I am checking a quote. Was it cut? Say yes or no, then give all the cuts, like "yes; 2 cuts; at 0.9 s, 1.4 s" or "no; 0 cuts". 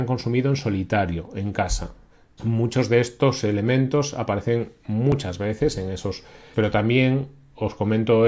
yes; 2 cuts; at 2.4 s, 6.5 s